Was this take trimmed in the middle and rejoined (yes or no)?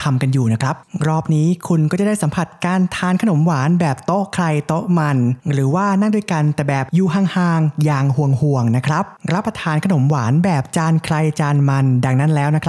no